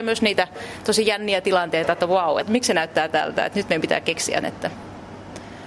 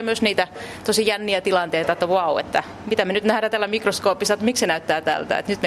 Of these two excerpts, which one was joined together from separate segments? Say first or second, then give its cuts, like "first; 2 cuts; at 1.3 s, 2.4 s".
first; 2 cuts; at 2.4 s, 4.4 s